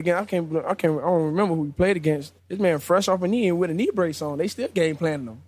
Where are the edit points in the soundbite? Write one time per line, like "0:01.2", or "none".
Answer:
0:02.4